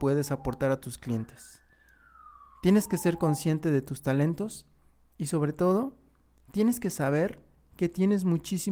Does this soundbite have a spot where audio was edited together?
no; 0 cuts

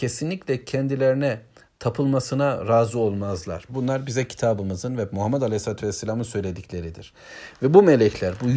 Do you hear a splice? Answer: yes; 1 cut; at 3.7 s

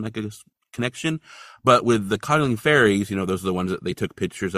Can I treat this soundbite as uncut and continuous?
yes; 0 cuts

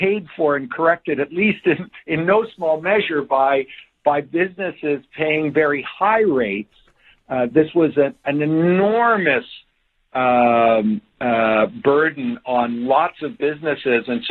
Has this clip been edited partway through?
no; 0 cuts

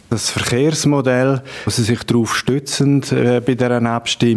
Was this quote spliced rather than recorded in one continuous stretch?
no; 0 cuts

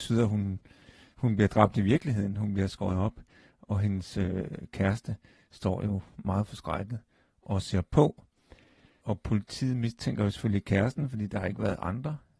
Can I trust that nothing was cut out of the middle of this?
yes; 0 cuts

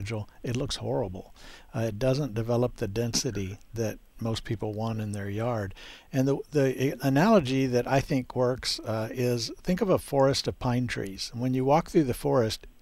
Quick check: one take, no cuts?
yes; 0 cuts

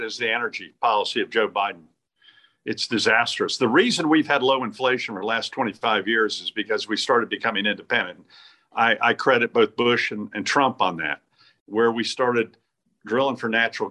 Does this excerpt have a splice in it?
yes; 1 cut; at 11.6 s

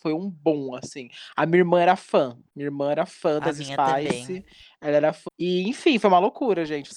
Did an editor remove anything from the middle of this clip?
yes; 1 cut; at 5.3 s

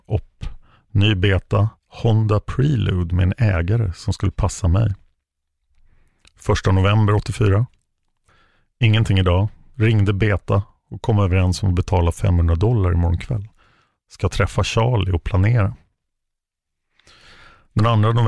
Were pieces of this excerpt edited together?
no; 0 cuts

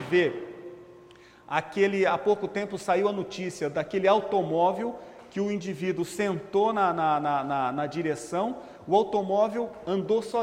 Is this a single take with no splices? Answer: yes; 0 cuts

